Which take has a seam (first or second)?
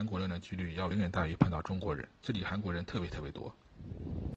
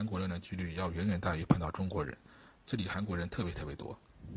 first